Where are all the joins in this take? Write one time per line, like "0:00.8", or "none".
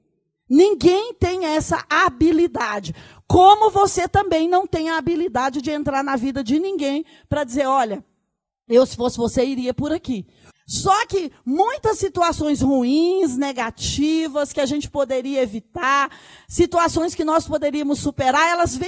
0:10.5